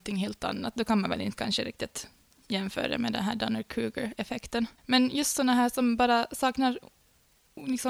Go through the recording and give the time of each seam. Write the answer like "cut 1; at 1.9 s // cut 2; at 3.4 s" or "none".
cut 1; at 4.8 s